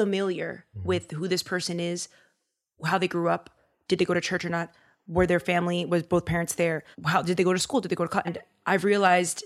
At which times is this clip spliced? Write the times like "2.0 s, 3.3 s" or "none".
6.9 s, 8.2 s